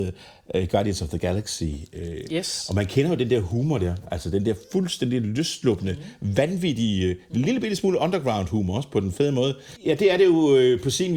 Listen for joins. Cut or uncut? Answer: cut